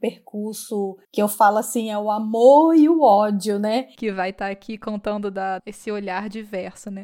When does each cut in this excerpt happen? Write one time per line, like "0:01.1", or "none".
0:01.0
0:04.0
0:05.6